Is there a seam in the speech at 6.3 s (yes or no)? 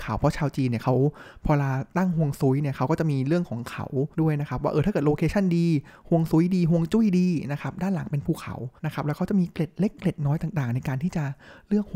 no